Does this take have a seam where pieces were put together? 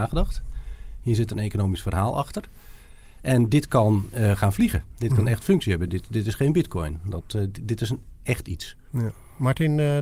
no; 0 cuts

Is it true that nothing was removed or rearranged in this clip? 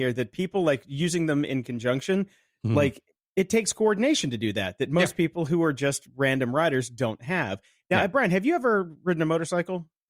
yes; 0 cuts

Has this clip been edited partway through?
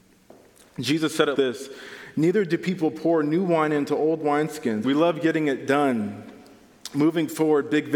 yes; 2 cuts; at 1.4 s, 4.8 s

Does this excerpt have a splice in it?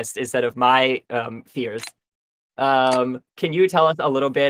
no; 0 cuts

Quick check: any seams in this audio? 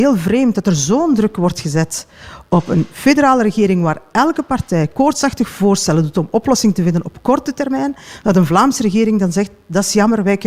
no; 0 cuts

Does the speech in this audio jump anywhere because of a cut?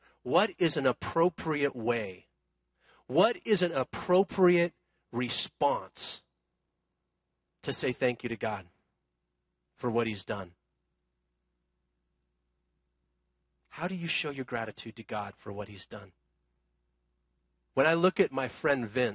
yes; 1 cut; at 17.7 s

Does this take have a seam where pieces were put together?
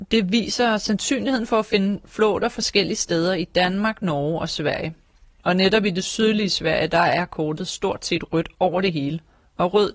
no; 0 cuts

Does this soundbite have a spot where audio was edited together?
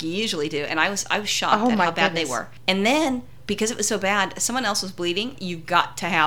yes; 1 cut; at 5.3 s

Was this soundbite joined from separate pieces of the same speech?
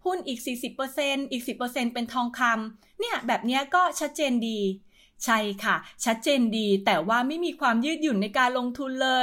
no; 0 cuts

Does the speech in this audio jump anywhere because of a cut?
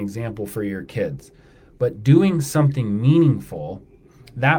no; 0 cuts

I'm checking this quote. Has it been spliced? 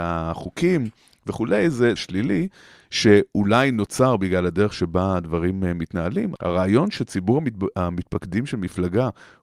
yes; 2 cuts; at 2.0 s, 6.4 s

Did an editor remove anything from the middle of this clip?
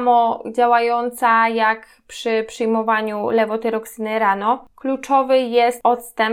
no; 0 cuts

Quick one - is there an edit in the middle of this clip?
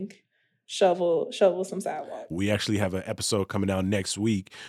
yes; 1 cut; at 2.3 s

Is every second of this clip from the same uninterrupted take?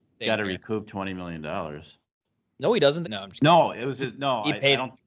no; 1 cut; at 3.0 s

